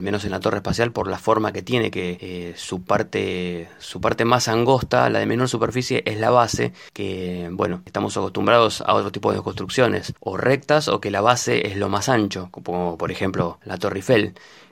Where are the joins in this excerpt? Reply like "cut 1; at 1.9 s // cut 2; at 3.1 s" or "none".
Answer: none